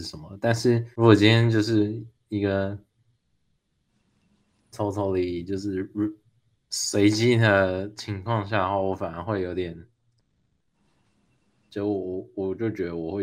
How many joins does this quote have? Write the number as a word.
one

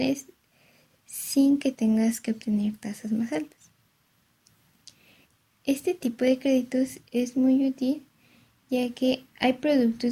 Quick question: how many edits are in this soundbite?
zero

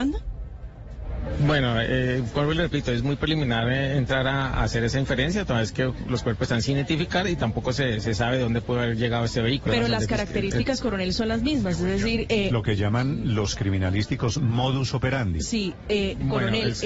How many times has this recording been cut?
one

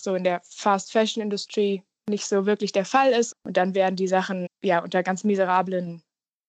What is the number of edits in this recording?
two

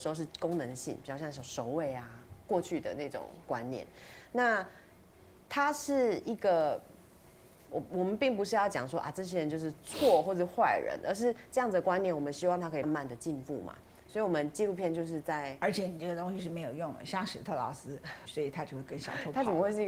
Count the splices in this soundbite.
two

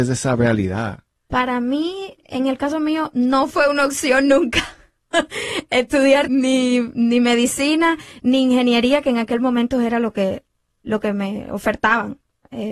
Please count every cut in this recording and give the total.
two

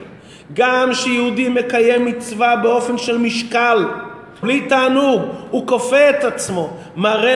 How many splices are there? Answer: one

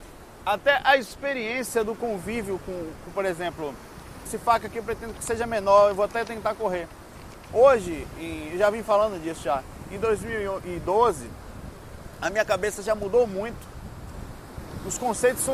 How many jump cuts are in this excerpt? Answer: two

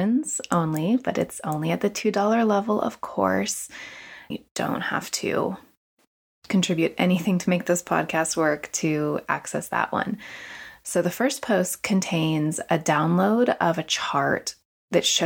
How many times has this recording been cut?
one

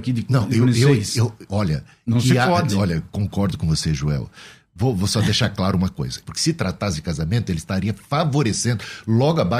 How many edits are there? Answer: one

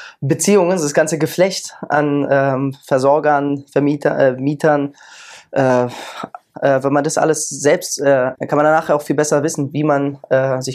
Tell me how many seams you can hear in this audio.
two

